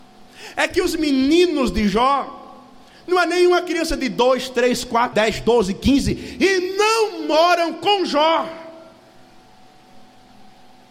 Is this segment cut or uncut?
cut